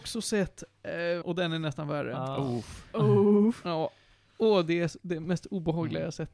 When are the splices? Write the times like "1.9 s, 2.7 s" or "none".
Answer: 1.2 s